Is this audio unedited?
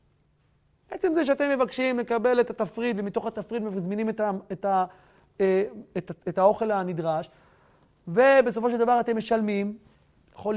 yes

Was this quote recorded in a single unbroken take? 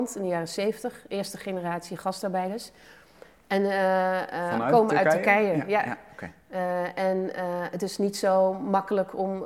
yes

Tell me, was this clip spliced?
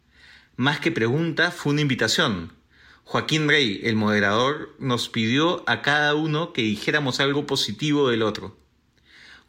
no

